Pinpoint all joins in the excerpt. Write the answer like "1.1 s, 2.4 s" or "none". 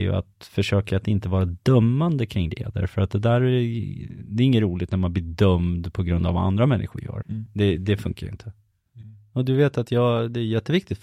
7.2 s, 8.9 s